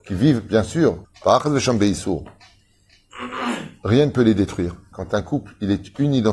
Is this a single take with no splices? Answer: no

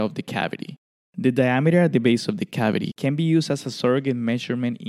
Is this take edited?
yes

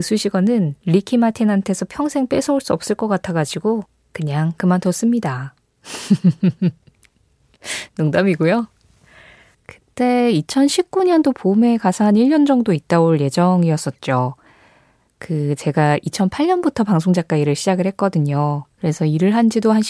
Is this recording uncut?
no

